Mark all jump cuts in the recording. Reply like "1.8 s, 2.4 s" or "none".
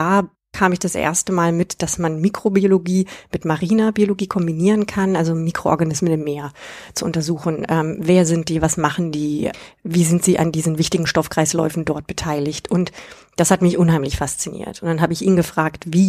none